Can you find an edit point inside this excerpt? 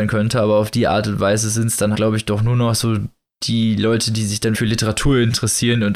yes; 2 cuts; at 1.9 s, 4.5 s

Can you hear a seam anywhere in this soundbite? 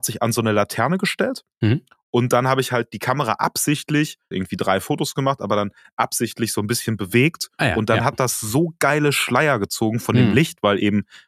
yes; 1 cut; at 4.3 s

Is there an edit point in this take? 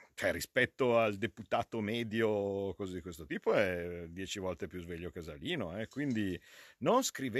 no; 0 cuts

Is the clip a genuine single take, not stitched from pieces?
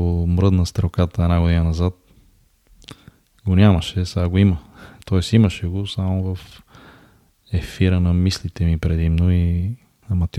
yes; 0 cuts

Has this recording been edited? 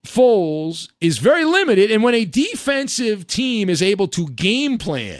no; 0 cuts

